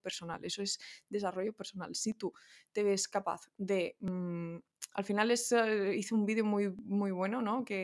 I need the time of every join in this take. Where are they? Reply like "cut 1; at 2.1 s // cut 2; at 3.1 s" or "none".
none